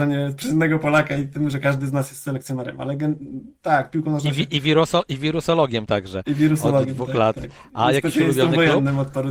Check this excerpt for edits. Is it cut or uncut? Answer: uncut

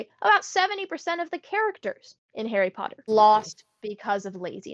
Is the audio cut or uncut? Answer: cut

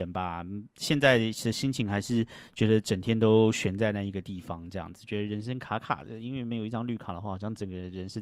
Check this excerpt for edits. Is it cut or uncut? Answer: uncut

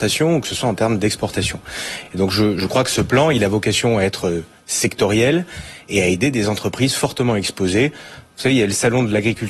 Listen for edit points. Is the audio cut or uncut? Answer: uncut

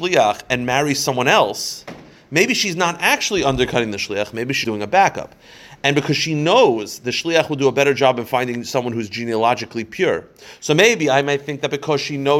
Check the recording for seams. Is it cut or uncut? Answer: cut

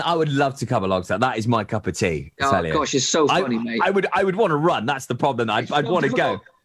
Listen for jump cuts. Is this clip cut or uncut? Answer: uncut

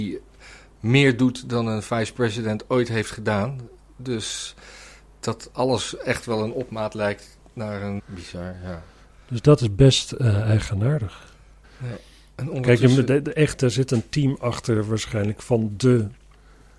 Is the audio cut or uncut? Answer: cut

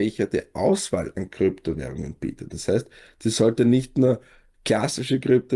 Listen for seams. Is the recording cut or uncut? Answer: uncut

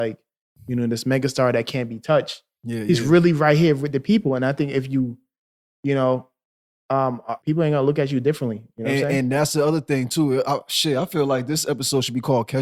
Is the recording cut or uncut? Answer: cut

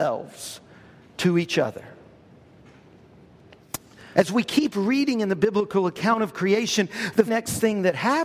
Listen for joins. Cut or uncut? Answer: cut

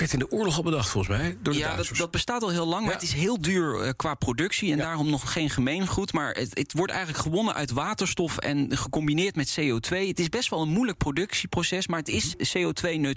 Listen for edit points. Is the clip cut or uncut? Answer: uncut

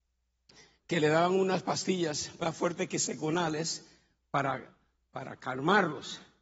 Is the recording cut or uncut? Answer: uncut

